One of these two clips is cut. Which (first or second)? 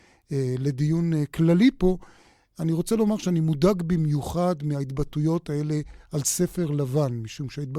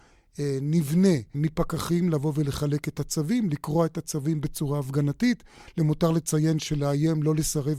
second